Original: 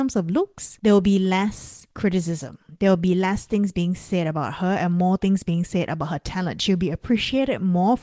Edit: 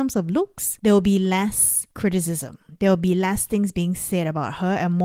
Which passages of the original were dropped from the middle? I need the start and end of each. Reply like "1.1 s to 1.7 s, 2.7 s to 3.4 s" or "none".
none